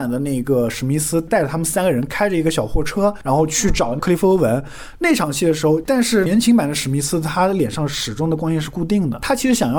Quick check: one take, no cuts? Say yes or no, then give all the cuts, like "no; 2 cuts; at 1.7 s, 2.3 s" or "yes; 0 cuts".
no; 1 cut; at 5.8 s